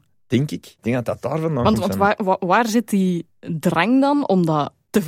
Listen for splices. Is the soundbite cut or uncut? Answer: uncut